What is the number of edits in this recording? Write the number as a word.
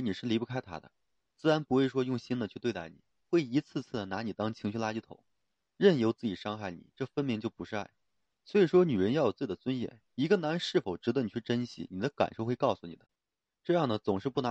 zero